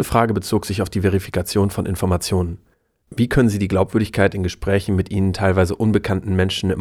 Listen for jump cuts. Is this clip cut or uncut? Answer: uncut